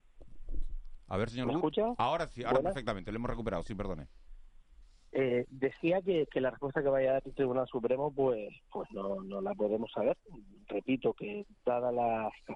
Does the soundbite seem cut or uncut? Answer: uncut